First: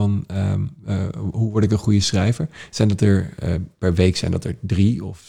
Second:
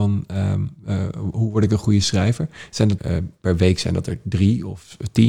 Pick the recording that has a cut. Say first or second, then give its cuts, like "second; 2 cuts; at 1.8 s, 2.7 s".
second; 1 cut; at 3.0 s